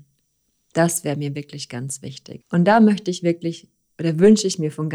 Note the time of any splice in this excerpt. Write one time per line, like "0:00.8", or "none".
0:02.4